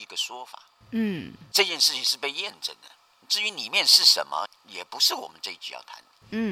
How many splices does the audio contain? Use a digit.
2